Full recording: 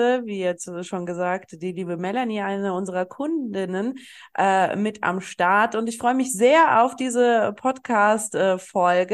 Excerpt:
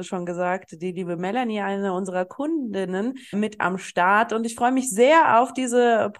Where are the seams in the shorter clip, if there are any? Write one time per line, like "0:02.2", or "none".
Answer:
0:03.3